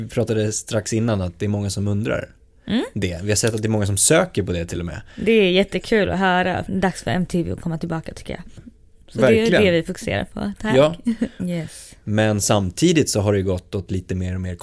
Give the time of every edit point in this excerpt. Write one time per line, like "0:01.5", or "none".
0:06.7
0:08.6
0:11.4

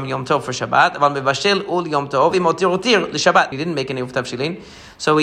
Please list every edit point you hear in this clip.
0:02.3
0:03.5

